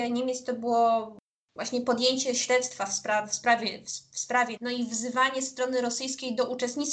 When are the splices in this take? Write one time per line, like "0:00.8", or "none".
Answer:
0:04.6